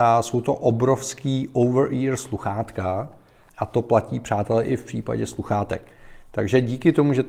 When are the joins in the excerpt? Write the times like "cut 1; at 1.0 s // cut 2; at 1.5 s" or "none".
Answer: cut 1; at 3.5 s